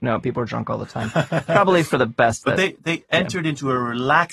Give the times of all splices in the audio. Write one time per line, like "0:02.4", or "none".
none